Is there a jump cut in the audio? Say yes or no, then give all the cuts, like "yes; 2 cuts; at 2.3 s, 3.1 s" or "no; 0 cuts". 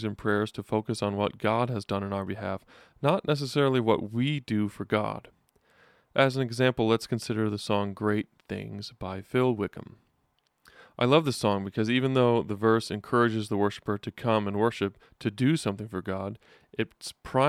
no; 0 cuts